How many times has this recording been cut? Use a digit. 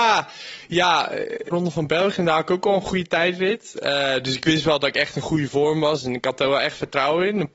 1